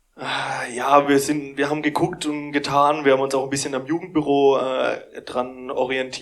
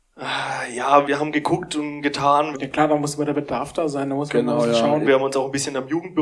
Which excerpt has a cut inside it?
second; 3 cuts; at 1.0 s, 2.5 s, 5.0 s

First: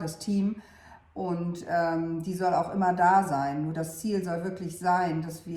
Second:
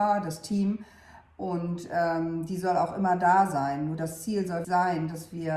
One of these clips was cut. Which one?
second; 1 cut; at 4.6 s

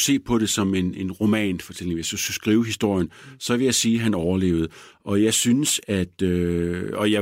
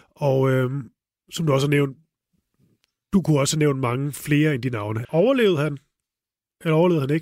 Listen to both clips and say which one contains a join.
second; 1 cut; at 5.0 s

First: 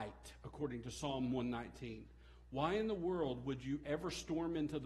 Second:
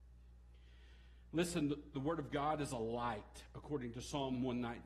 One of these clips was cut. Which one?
second; 1 cut; at 1.9 s

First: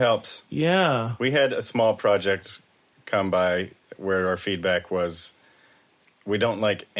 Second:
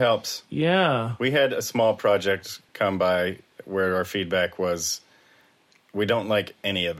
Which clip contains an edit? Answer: second; 1 cut; at 2.7 s

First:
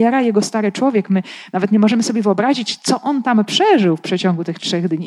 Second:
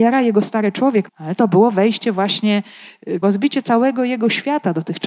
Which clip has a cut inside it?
second; 2 cuts; at 1.1 s, 3.2 s

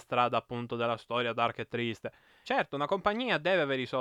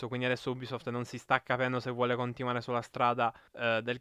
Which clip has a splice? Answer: first; 1 cut; at 2.4 s

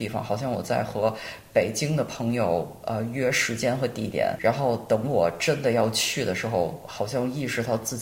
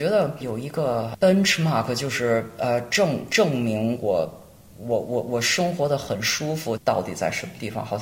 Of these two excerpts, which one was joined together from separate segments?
second; 1 cut; at 6.8 s

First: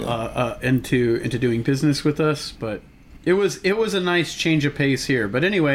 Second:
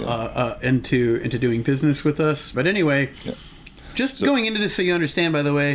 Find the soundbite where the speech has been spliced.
second; 1 cut; at 2.5 s

